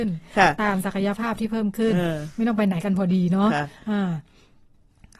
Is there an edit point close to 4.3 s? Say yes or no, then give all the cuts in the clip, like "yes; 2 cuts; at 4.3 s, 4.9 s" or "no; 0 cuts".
no; 0 cuts